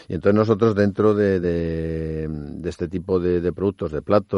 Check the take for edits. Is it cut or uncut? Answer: uncut